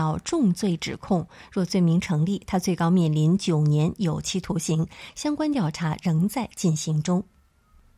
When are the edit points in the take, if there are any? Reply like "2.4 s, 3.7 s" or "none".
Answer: none

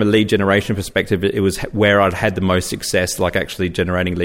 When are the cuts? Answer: none

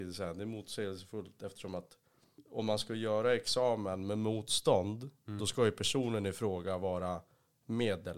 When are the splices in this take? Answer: none

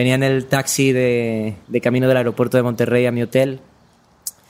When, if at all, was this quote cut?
1.6 s

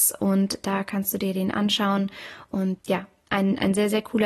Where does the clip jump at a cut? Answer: 2.8 s

